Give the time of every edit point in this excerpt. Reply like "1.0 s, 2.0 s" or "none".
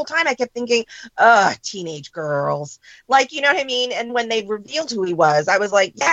4.1 s